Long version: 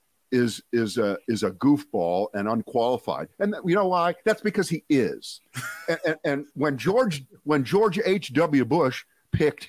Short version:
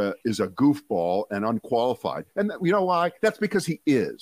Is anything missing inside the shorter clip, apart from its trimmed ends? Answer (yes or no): no